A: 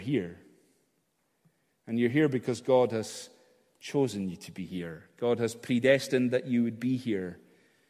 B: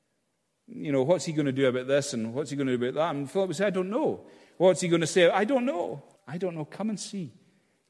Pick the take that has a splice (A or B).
B